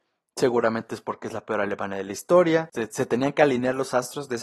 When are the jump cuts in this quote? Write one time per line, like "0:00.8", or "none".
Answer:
0:02.7